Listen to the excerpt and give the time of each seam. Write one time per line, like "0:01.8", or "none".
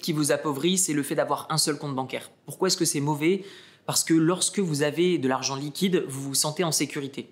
none